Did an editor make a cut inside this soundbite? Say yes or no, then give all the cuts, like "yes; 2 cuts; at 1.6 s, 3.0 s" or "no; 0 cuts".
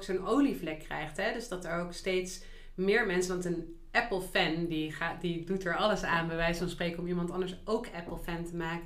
no; 0 cuts